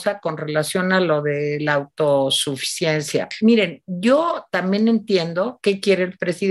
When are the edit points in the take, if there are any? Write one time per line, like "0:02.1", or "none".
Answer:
none